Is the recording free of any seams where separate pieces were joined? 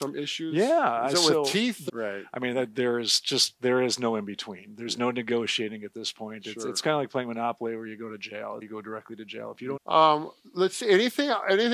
no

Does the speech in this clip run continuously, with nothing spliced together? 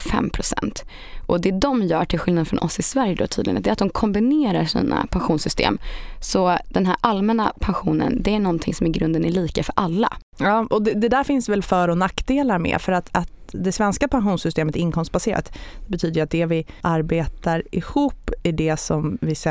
no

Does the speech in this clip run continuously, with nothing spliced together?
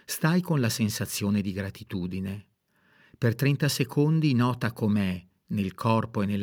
yes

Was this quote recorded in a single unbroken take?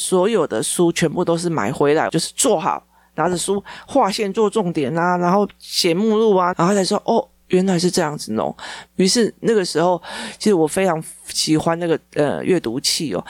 no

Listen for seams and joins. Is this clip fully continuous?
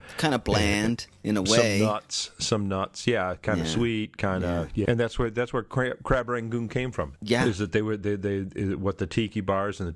no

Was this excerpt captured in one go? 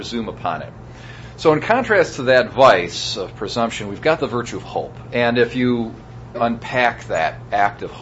no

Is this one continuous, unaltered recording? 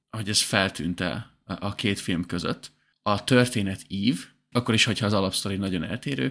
no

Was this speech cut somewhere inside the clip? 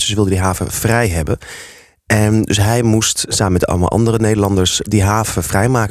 no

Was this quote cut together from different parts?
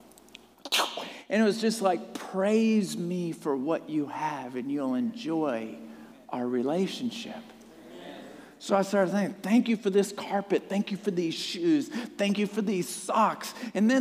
no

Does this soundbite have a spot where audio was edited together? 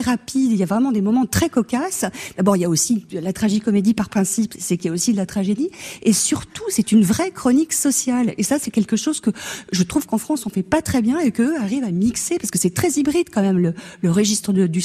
no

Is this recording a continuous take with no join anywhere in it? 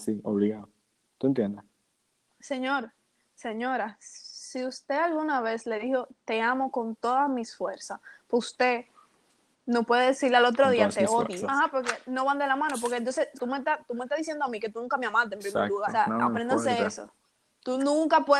no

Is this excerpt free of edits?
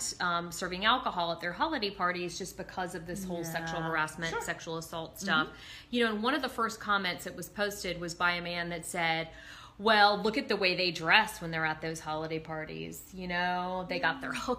yes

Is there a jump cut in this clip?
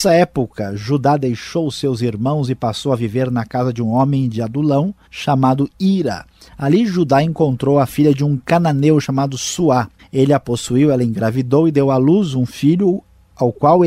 yes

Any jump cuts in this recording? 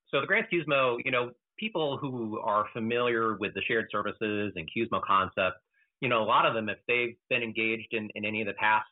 no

